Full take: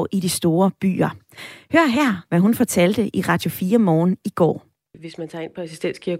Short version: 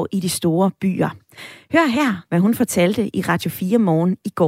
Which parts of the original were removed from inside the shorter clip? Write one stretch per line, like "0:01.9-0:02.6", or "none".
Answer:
none